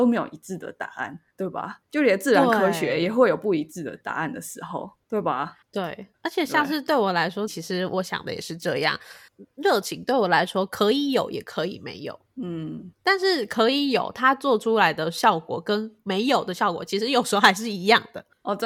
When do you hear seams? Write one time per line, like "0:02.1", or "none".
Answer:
0:07.5